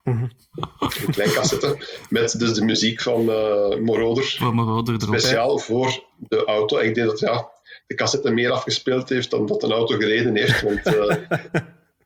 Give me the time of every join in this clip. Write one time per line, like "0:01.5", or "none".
none